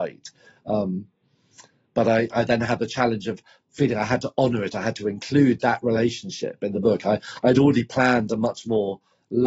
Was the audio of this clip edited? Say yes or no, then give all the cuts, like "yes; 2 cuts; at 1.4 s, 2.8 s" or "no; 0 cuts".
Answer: no; 0 cuts